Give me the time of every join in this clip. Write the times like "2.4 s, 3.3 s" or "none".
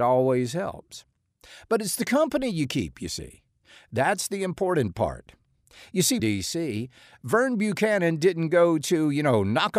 6.2 s